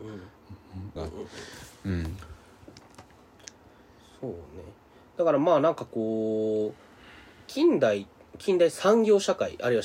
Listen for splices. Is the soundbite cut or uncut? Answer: cut